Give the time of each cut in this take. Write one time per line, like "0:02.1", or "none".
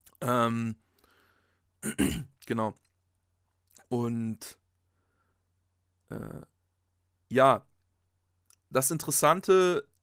none